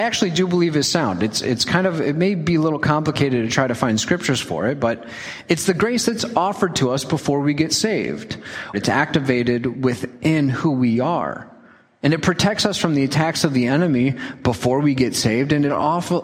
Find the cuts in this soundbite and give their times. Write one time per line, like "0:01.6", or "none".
0:08.7